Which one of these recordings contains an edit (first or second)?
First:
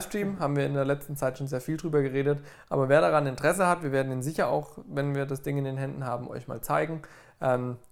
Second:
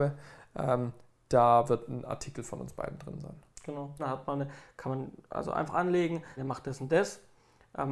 second